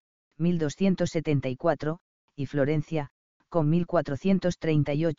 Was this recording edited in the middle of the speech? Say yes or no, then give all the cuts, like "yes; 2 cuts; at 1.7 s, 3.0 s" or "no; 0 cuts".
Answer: no; 0 cuts